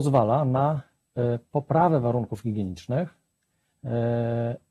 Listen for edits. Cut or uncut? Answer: uncut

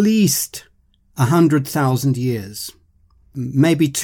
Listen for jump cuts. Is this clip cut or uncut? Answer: uncut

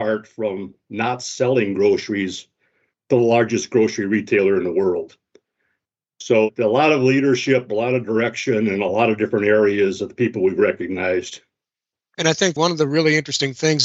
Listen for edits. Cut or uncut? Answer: uncut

